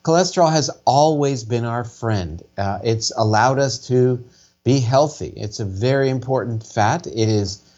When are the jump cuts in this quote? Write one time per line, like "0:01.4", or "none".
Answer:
none

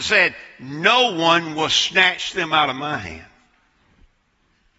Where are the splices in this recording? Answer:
none

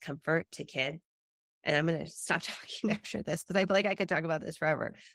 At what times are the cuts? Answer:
none

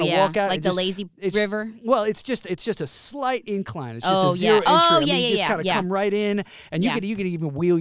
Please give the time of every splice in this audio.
none

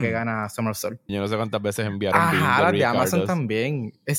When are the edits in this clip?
0:01.1

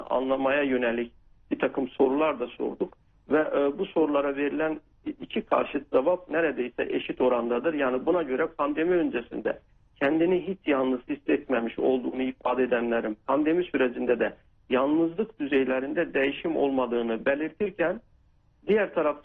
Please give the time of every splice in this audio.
none

